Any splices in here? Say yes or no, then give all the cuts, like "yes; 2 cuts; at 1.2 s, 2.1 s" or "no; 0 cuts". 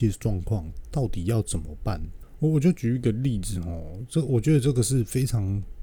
no; 0 cuts